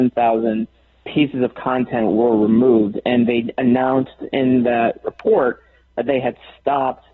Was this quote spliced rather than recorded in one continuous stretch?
no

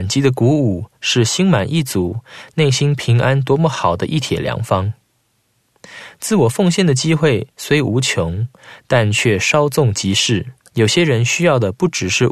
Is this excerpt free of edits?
no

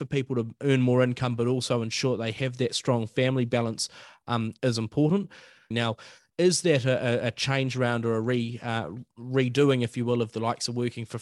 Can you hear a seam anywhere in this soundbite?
yes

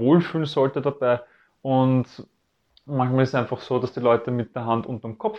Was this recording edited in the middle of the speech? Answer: no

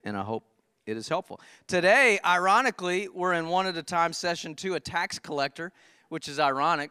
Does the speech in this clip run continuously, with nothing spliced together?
yes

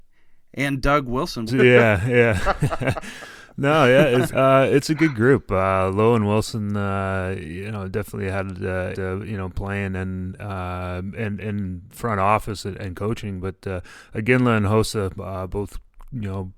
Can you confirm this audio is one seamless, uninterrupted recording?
no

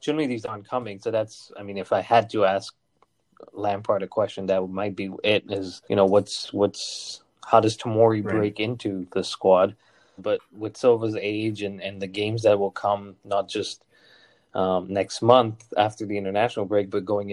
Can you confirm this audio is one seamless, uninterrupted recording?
no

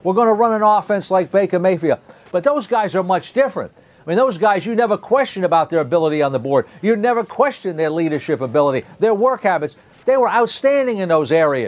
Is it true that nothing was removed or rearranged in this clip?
yes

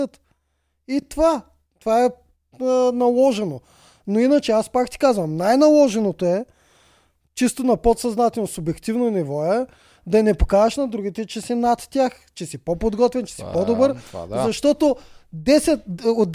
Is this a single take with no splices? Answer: yes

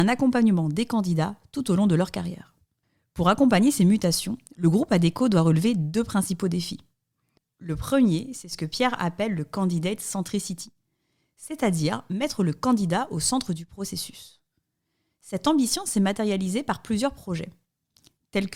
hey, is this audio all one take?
yes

